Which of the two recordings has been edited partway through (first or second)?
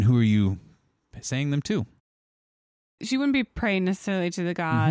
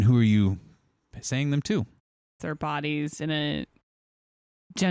second